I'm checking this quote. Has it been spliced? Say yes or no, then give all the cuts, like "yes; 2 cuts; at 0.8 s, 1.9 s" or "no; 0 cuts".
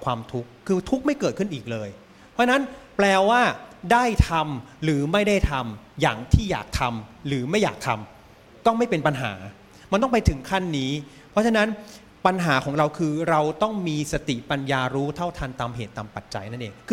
no; 0 cuts